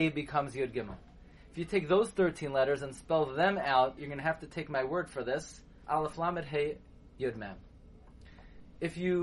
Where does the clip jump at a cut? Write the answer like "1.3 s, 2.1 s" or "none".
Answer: 4.0 s, 5.8 s